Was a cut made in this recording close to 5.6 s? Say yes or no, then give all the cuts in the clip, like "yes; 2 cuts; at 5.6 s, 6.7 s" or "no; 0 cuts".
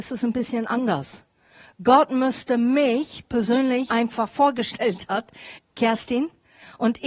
yes; 2 cuts; at 3.9 s, 5.6 s